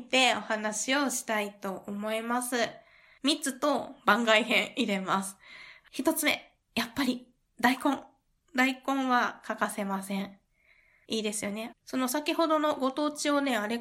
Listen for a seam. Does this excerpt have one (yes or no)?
yes